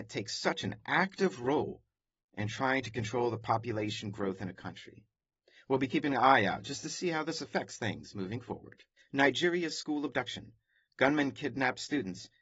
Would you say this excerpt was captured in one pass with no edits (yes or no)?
no